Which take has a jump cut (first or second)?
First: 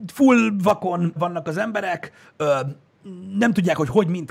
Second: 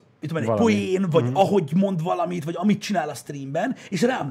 first